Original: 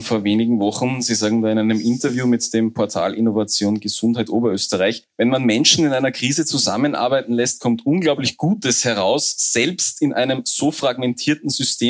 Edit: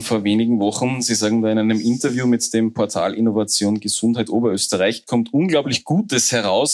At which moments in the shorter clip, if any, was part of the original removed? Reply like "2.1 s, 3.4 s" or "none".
5.1 s